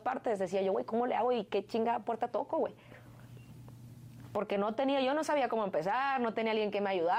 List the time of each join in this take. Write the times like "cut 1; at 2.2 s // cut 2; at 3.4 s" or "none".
none